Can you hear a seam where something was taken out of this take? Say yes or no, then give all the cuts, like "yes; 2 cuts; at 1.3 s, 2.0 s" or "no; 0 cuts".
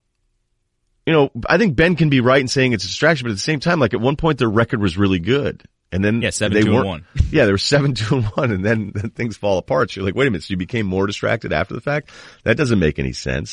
no; 0 cuts